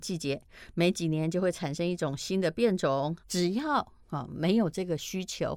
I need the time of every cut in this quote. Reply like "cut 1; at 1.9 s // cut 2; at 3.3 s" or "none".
cut 1; at 3.2 s